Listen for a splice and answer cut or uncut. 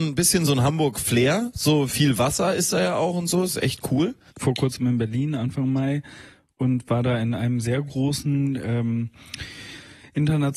cut